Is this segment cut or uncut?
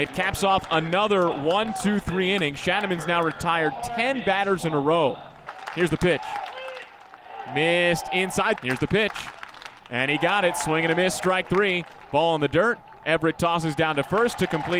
cut